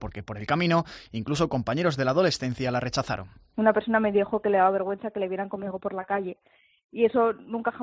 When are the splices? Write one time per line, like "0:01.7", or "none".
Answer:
none